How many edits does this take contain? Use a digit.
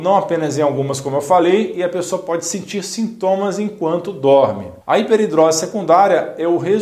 1